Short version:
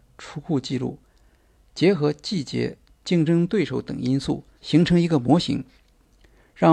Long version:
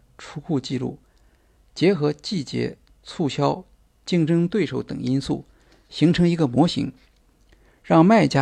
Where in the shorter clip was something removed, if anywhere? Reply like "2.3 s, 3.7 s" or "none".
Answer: 2.9 s, 4.5 s